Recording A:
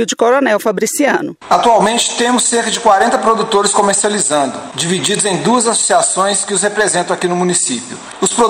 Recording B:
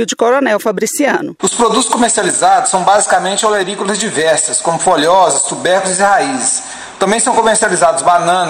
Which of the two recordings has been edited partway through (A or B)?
B